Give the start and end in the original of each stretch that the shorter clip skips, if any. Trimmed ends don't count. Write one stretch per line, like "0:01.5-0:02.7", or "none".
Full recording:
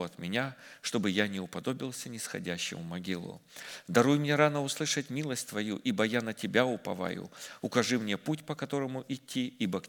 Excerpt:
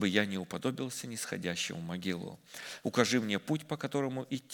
0:03.8-0:07.6